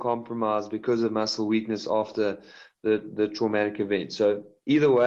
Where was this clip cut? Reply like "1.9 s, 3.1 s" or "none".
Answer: none